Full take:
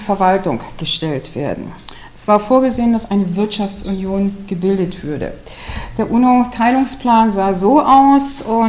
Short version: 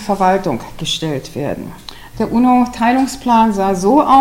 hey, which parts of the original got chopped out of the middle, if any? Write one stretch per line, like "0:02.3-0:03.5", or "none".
0:02.1-0:05.9